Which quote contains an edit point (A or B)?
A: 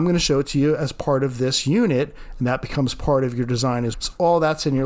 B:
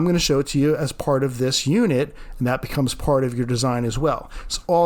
A